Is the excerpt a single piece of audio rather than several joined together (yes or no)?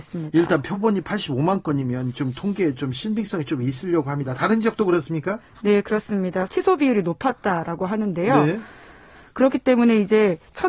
no